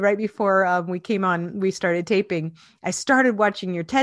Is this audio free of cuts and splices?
yes; 0 cuts

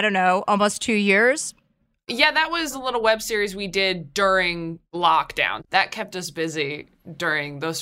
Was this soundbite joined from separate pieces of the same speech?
no; 0 cuts

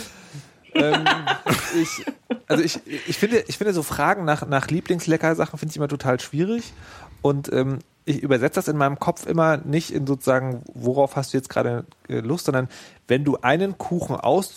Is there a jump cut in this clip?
no; 0 cuts

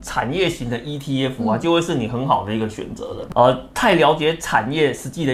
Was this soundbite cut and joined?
yes; 1 cut; at 3.3 s

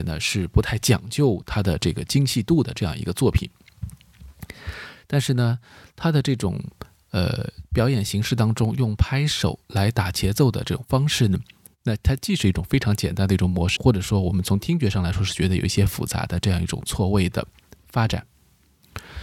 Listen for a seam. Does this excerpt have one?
yes; 2 cuts; at 11.7 s, 13.8 s

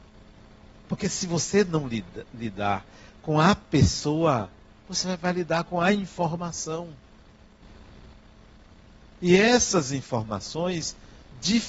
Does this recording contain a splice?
no; 0 cuts

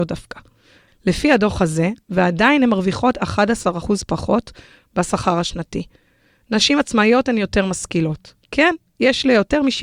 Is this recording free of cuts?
no; 1 cut; at 2.0 s

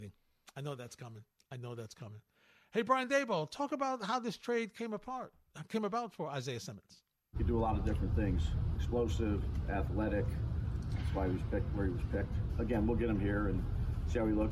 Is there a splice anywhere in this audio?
no; 0 cuts

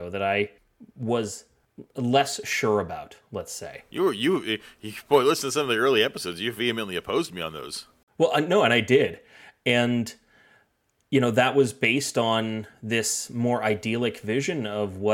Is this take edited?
no; 0 cuts

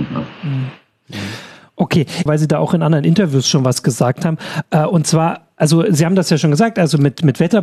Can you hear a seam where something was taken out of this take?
yes; 1 cut; at 2.3 s

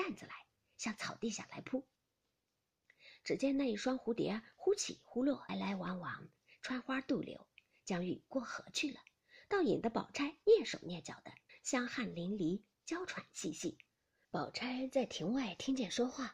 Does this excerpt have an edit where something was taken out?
yes; 3 cuts; at 5.5 s, 11.5 s, 14.2 s

